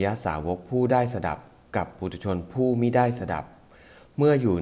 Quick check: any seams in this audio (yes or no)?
no